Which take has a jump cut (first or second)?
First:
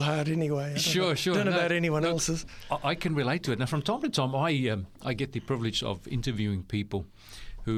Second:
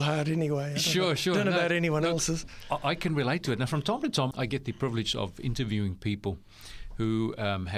second